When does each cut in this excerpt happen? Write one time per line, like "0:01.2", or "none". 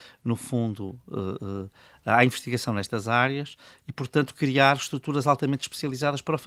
none